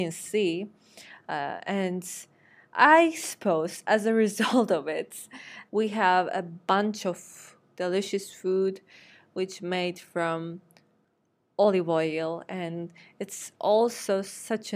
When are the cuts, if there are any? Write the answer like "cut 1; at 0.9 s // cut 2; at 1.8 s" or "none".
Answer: cut 1; at 5.7 s